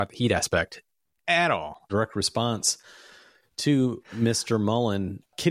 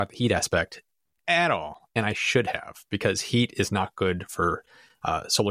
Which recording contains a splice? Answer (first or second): first